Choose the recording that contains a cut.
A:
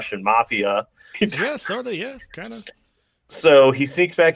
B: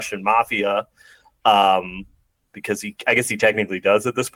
A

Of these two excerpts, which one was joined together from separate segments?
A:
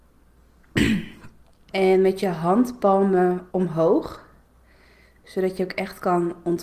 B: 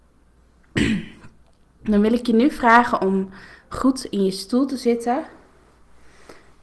A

